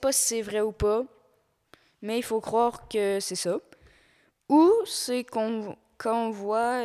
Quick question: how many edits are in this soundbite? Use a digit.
0